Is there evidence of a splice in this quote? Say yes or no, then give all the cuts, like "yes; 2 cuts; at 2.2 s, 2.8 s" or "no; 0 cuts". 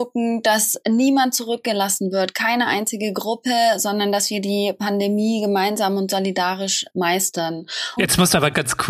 yes; 1 cut; at 8.0 s